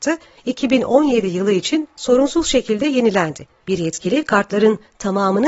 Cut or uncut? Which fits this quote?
cut